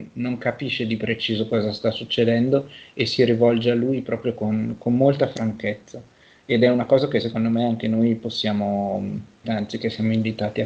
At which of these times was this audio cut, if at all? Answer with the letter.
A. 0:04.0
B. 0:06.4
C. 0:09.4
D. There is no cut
C